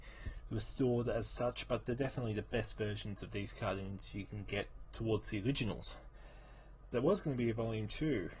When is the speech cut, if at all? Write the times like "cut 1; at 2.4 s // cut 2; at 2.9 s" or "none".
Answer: cut 1; at 6.9 s